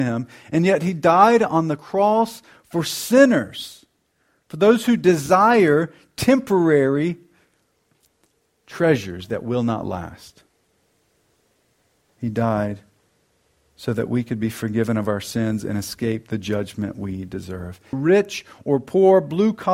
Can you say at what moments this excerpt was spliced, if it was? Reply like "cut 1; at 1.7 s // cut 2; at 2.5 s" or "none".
cut 1; at 17.9 s